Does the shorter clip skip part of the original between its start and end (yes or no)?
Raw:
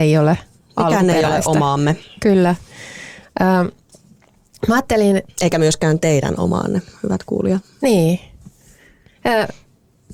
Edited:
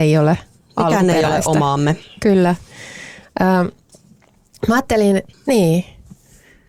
yes